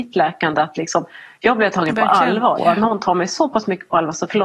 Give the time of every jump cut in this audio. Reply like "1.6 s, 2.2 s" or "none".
2.6 s